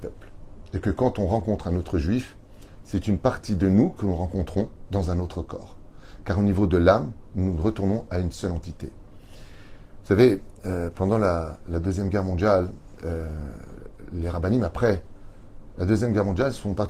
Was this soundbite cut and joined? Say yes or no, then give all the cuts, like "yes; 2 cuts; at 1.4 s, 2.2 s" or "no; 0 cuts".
no; 0 cuts